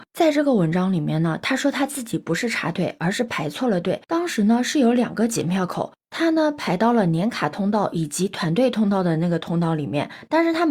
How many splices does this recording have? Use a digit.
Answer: 0